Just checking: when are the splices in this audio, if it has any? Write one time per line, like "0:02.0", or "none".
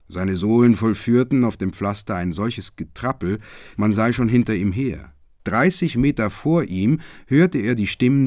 0:03.7
0:05.2